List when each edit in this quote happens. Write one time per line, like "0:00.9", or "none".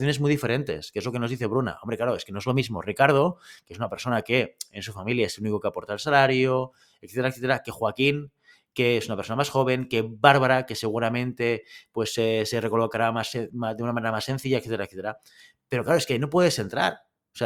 none